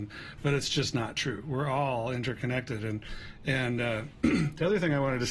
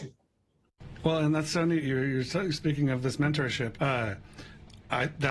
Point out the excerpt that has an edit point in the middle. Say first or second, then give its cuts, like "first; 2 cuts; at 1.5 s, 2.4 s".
second; 1 cut; at 3.7 s